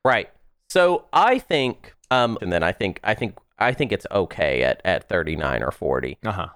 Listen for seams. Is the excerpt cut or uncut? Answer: cut